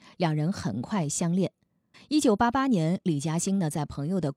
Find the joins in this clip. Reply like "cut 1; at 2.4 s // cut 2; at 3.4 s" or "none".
cut 1; at 1.9 s